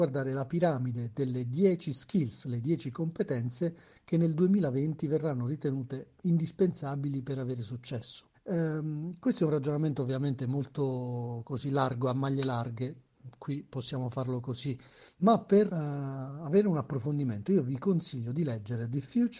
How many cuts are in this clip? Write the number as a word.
two